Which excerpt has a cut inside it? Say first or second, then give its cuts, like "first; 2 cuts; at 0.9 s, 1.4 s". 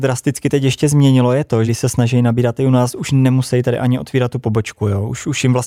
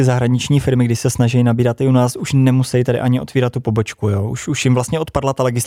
first; 1 cut; at 1.7 s